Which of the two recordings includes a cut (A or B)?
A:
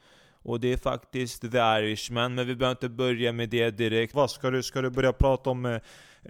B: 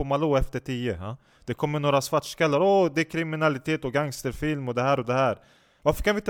A